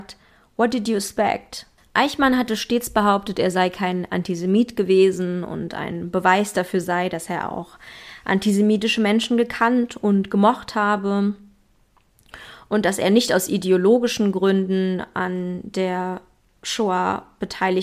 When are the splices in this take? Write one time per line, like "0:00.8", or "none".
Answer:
0:01.8